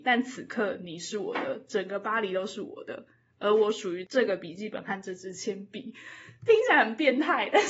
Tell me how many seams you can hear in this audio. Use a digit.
0